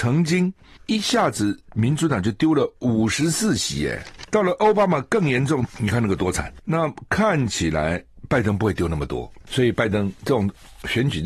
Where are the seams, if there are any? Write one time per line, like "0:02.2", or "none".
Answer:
0:05.7